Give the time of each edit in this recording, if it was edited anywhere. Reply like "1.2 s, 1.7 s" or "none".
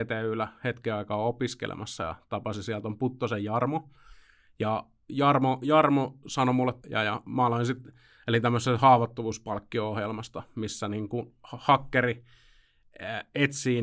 6.8 s